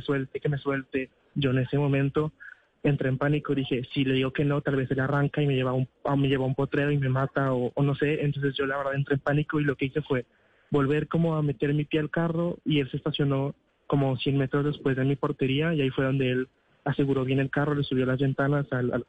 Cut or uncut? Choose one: cut